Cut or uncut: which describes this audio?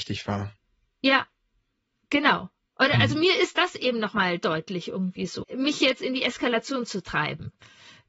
cut